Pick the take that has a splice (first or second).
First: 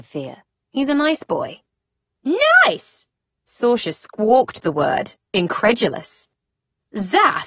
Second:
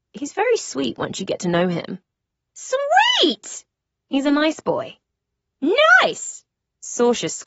second